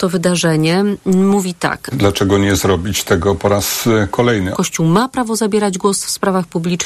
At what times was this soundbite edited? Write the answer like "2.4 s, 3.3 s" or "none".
1.9 s, 4.5 s